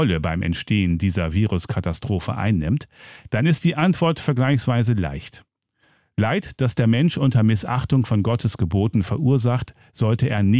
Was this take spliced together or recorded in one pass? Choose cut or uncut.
uncut